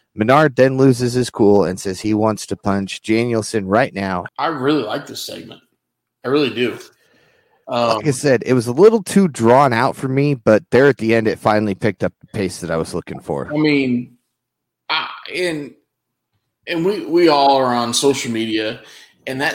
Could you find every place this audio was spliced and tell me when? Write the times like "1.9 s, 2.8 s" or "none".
4.3 s